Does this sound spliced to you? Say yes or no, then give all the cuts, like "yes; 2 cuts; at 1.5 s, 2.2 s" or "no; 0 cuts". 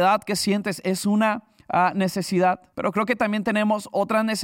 yes; 1 cut; at 2.7 s